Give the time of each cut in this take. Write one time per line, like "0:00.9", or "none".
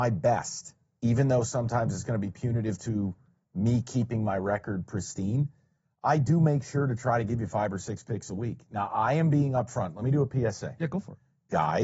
none